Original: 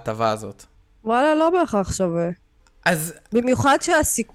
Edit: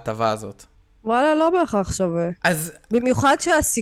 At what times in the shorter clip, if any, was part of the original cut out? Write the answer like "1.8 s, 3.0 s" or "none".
2.4 s